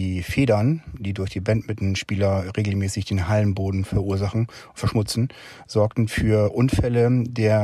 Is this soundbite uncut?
yes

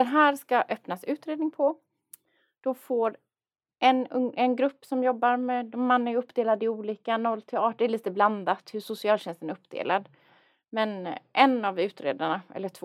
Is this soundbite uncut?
yes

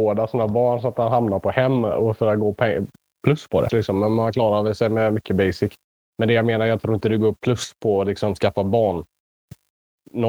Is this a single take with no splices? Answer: no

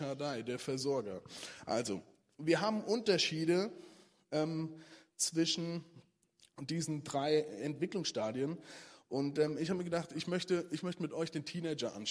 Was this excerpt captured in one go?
yes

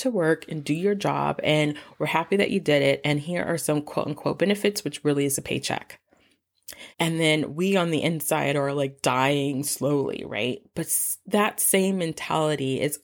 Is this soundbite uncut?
no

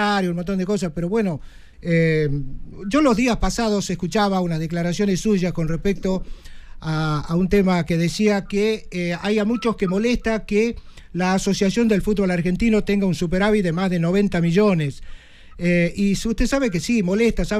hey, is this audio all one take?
no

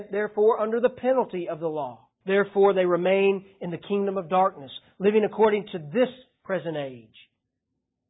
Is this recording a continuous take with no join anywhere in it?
no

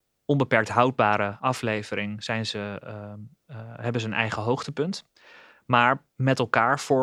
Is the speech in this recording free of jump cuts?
yes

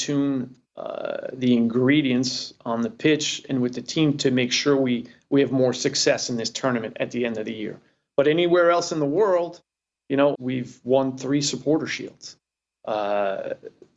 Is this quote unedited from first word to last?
no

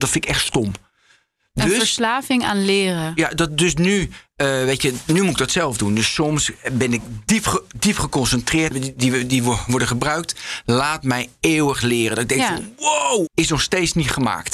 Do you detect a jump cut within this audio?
yes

